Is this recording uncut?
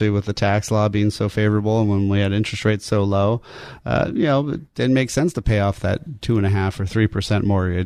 yes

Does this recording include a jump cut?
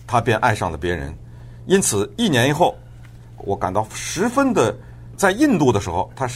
yes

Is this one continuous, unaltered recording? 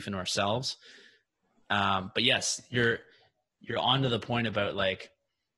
yes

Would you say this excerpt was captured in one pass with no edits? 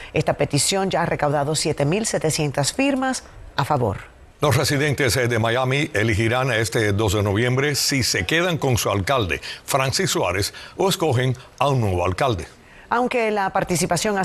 no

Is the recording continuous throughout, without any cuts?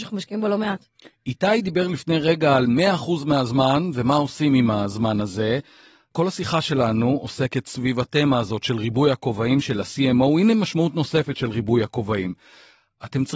yes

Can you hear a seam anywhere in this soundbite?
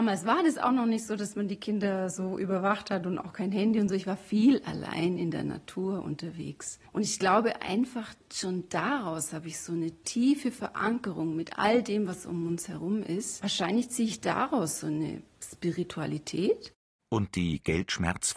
no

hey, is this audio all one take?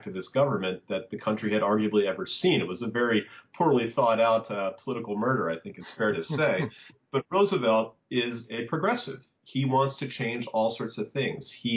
yes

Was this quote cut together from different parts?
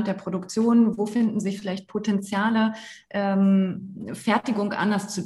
no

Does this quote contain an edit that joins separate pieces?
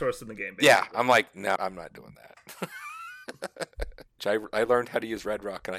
yes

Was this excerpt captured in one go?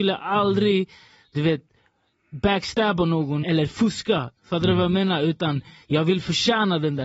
no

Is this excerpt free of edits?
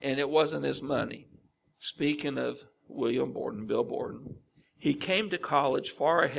no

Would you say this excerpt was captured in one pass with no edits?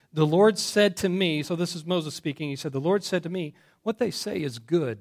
yes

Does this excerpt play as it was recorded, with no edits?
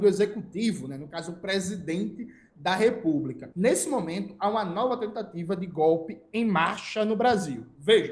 no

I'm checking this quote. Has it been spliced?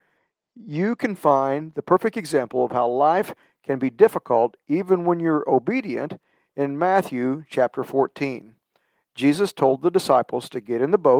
no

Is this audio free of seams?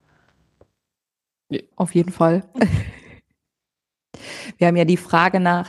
no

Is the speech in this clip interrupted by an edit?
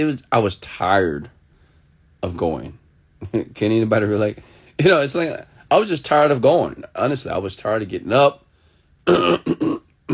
no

